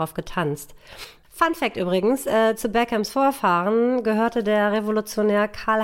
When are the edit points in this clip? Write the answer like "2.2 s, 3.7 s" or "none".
1.2 s